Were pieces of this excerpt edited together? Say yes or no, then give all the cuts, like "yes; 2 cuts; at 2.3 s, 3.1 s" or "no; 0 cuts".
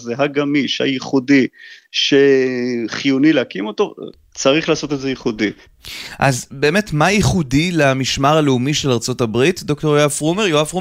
no; 0 cuts